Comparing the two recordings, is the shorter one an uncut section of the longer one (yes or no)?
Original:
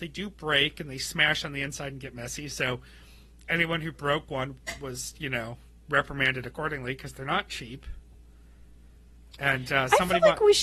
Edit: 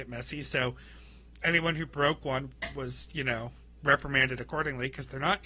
yes